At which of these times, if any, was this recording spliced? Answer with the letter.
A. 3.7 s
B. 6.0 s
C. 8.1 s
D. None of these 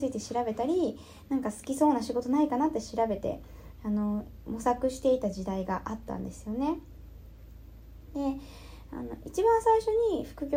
D